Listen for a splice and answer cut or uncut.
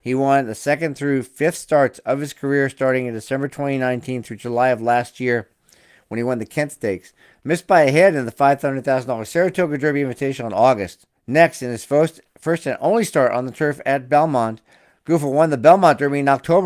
cut